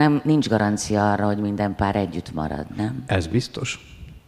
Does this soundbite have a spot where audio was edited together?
no; 0 cuts

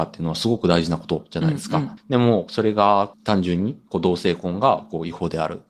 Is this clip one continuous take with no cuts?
no; 2 cuts; at 2.0 s, 3.1 s

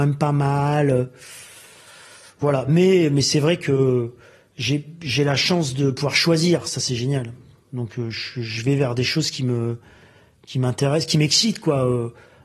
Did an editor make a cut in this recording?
no; 0 cuts

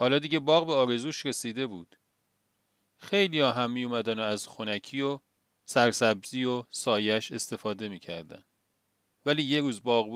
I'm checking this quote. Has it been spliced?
no; 0 cuts

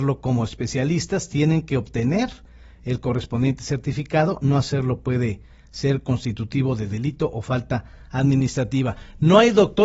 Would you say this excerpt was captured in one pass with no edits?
yes; 0 cuts

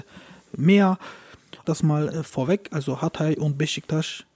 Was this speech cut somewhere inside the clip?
yes; 1 cut; at 1.6 s

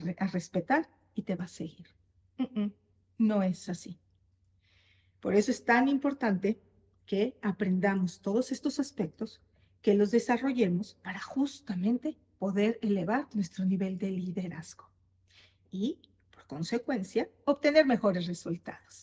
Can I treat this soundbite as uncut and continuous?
yes; 0 cuts

